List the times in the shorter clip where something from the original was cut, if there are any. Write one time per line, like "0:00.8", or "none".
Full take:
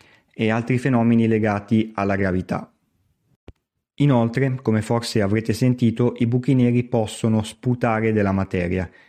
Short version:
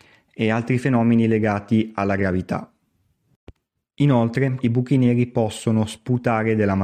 0:04.6